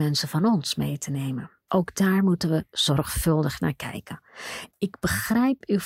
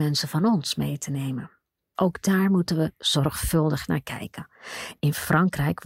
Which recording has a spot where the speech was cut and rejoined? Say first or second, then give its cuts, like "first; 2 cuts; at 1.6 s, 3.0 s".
first; 2 cuts; at 1.6 s, 4.7 s